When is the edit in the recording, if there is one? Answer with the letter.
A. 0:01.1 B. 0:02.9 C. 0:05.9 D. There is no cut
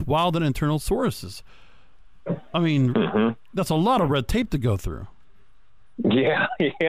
B